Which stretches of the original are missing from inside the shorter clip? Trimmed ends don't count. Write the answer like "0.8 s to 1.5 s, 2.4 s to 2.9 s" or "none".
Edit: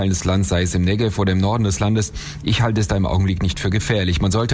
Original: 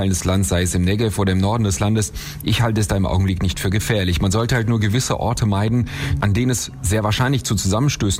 none